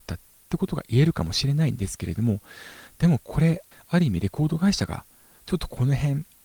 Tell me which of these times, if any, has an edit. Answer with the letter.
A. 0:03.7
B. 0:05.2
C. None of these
A